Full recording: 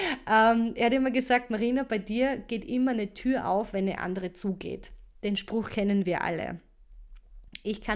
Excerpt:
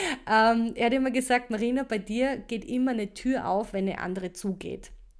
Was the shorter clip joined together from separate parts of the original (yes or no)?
no